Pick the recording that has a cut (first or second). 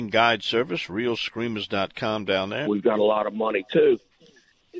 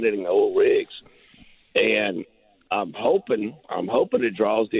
first